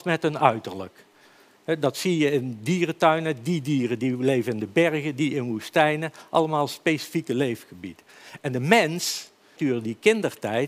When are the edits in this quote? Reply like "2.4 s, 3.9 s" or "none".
9.6 s